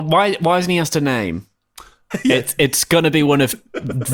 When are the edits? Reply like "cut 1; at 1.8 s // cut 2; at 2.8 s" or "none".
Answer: cut 1; at 2.1 s

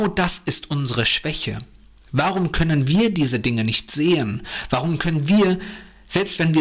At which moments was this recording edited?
none

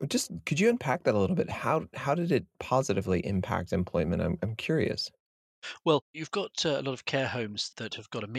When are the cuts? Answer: none

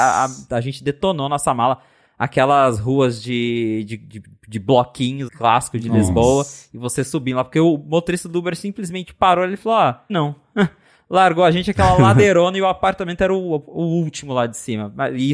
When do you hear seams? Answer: cut 1; at 5.3 s // cut 2; at 10.1 s

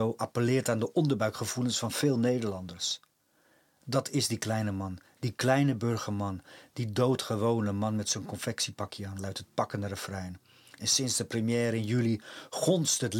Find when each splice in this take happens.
none

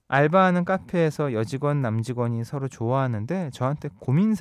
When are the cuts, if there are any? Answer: none

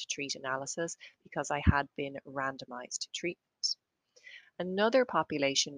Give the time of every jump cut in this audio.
none

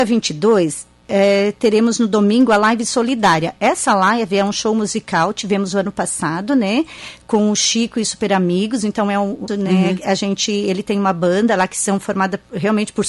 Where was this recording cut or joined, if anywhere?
cut 1; at 9.5 s

